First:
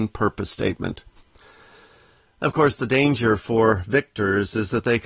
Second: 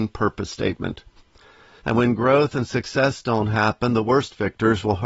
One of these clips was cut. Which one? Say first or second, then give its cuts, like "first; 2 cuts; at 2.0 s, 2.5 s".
second; 1 cut; at 1.8 s